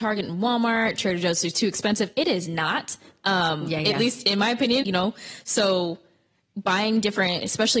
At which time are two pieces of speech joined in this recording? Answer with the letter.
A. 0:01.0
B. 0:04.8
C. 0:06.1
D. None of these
B